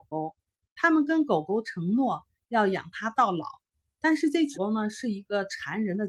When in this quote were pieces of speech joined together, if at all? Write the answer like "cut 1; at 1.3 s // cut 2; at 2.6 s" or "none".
cut 1; at 4.5 s